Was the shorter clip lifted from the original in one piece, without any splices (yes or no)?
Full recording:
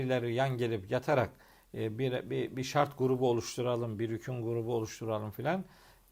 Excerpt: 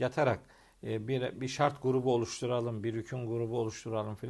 no